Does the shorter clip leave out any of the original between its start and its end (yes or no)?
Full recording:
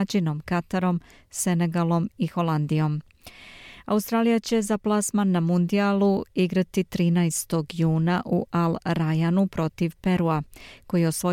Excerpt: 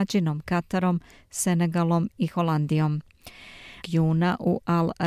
yes